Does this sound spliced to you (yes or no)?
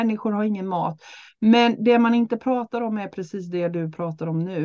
no